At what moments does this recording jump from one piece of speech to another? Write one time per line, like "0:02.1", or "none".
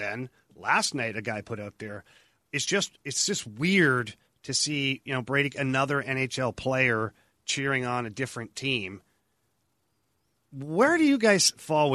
none